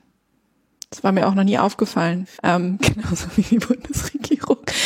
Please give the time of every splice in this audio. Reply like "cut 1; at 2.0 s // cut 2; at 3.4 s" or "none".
cut 1; at 2.4 s